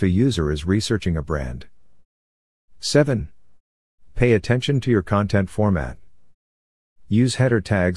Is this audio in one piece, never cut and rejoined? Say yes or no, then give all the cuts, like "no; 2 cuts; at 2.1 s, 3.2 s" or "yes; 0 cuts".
no; 1 cut; at 6.9 s